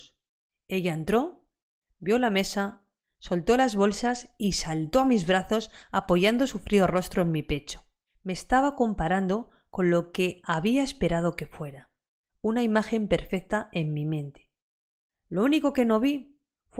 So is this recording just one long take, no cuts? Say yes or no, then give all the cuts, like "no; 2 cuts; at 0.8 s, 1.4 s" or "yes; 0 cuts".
no; 1 cut; at 8.1 s